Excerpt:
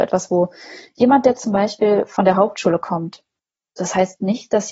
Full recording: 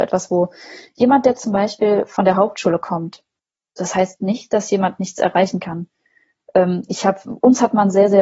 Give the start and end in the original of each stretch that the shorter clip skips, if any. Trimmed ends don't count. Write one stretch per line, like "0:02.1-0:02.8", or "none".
none